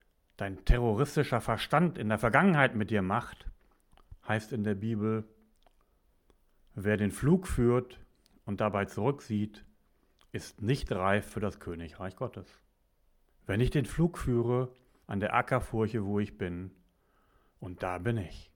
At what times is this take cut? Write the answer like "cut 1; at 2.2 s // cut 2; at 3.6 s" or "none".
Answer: cut 1; at 13.3 s // cut 2; at 15.0 s